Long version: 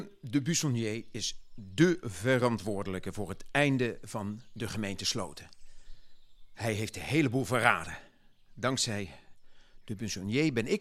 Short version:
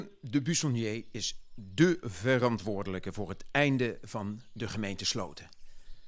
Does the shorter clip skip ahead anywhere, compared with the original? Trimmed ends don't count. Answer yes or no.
no